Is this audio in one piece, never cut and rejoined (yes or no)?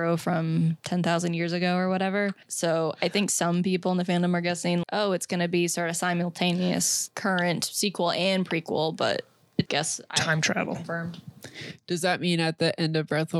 no